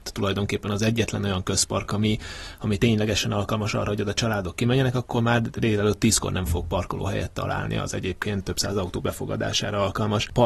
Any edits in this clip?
no; 0 cuts

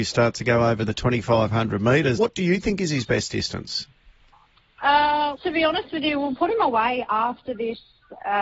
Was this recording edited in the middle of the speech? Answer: yes; 2 cuts; at 2.2 s, 5.3 s

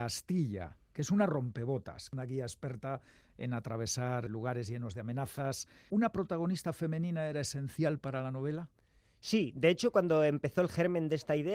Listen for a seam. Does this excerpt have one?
no; 0 cuts

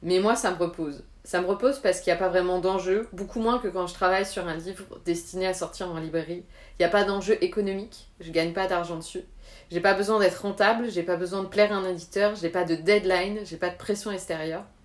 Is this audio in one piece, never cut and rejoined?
yes; 0 cuts

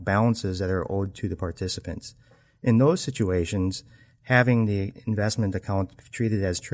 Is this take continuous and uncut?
yes; 0 cuts

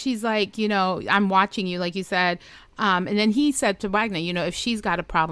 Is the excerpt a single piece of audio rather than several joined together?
yes; 0 cuts

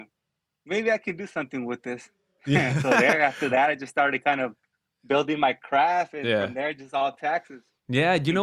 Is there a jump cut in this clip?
no; 0 cuts

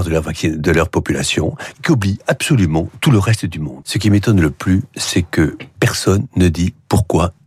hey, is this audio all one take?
no; 2 cuts; at 1.7 s, 3.8 s

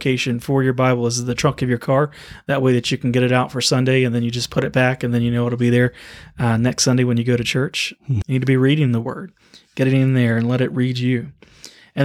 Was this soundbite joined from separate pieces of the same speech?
yes; 1 cut; at 8.2 s

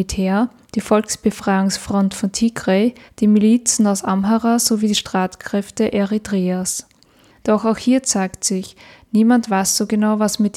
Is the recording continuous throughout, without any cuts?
no; 2 cuts; at 3.1 s, 7.4 s

